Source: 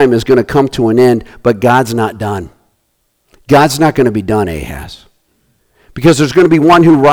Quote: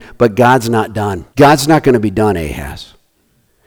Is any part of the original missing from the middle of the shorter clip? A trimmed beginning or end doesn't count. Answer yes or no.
yes